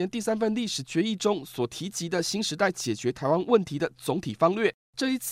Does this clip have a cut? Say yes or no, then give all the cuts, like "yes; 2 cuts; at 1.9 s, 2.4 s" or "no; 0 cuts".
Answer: no; 0 cuts